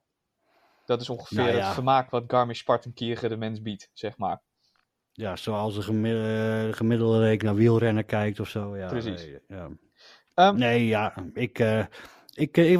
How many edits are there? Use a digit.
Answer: 0